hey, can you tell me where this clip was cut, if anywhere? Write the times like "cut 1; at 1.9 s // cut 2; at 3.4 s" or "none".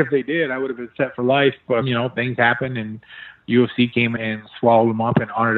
cut 1; at 1.8 s // cut 2; at 4.2 s